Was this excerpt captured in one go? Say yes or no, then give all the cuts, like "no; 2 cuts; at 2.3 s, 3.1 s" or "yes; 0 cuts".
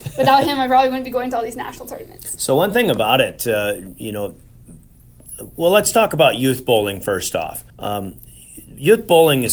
no; 1 cut; at 7.7 s